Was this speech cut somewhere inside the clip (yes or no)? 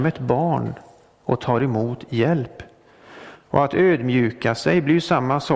no